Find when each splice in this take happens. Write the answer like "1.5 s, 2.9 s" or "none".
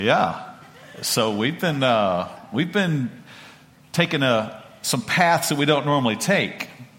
none